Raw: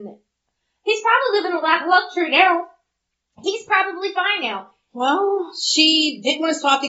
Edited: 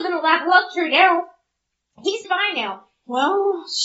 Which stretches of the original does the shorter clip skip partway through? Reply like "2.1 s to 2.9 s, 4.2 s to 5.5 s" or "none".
3.6 s to 4.1 s

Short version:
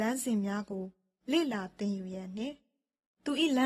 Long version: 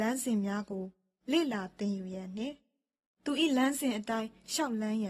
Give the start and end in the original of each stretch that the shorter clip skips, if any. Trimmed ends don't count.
none

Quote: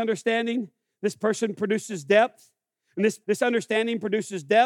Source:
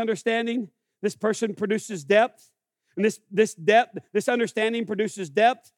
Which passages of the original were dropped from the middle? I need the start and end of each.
3.2 s to 4.1 s

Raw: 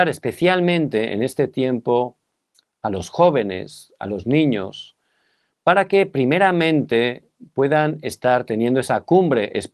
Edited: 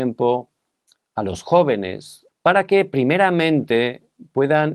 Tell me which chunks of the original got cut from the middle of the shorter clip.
4.0 s to 5.5 s

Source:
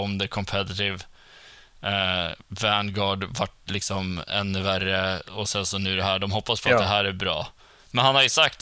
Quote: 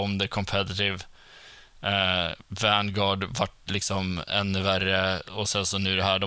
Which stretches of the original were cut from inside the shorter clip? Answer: none

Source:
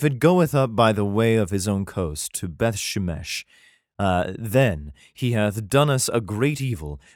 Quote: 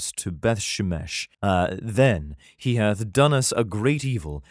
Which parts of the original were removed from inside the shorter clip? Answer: 3.5 s to 3.9 s

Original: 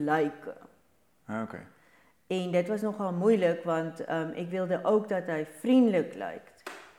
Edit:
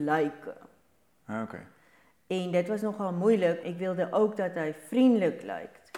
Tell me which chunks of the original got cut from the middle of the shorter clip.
3.6 s to 4.3 s

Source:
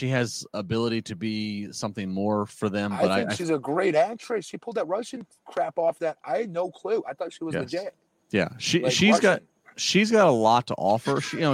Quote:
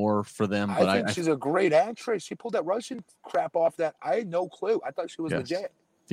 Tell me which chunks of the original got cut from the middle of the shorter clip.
none

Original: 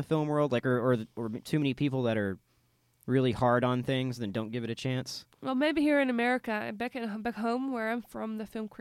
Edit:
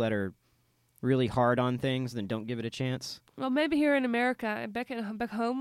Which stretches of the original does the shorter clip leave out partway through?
none

